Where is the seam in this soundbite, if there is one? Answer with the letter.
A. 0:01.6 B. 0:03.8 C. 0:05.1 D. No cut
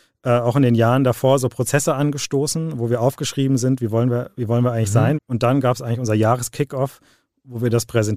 C